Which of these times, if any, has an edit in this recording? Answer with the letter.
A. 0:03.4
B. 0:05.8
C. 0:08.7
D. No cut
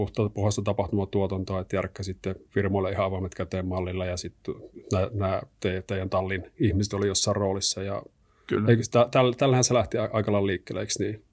D